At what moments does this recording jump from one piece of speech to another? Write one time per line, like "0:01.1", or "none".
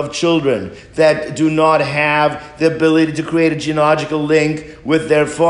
none